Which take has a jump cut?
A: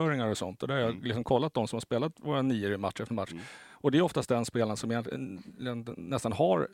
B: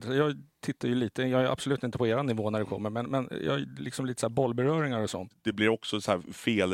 B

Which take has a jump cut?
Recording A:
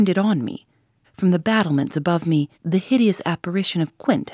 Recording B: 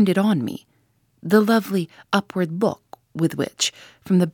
A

